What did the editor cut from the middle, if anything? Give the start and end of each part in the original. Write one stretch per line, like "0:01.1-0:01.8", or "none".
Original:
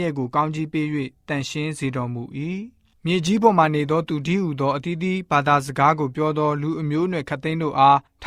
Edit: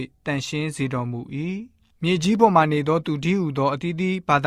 none